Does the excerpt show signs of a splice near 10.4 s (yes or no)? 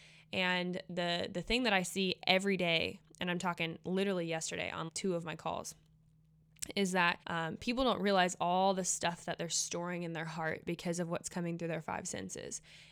no